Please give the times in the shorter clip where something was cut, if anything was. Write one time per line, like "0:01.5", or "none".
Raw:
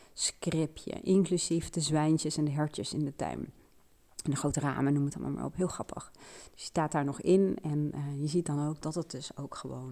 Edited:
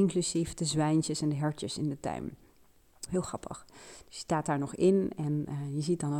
0:03.1